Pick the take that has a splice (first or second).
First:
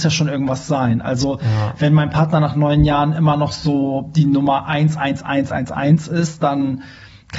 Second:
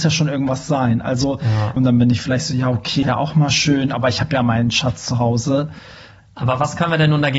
second